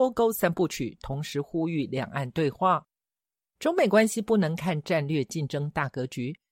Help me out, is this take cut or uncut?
uncut